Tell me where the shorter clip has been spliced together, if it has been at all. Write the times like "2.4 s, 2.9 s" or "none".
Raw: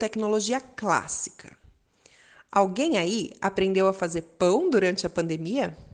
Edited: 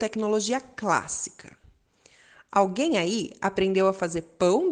none